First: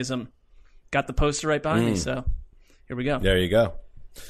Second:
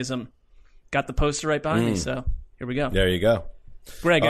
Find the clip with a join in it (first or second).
second